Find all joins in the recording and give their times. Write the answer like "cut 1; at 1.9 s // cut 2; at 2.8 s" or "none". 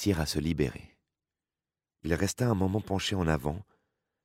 cut 1; at 1.9 s